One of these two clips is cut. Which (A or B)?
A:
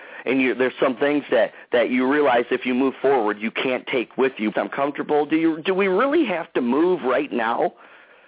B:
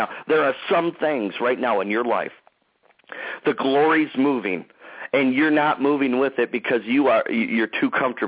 A